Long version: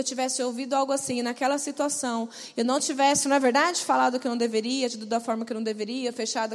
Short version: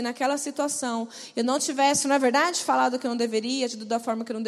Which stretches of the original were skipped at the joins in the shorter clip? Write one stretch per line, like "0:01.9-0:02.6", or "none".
none